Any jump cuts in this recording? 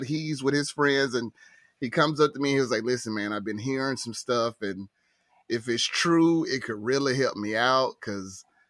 no; 0 cuts

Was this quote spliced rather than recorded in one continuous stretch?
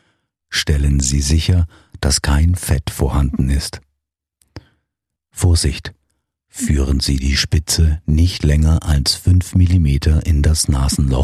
yes; 1 cut; at 5.2 s

